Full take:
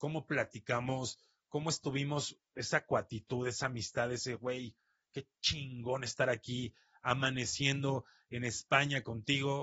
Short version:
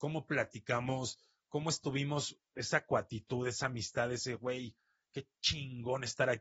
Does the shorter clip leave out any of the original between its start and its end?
no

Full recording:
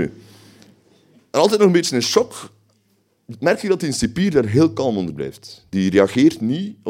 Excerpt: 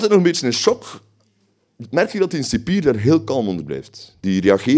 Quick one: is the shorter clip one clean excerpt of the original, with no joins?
yes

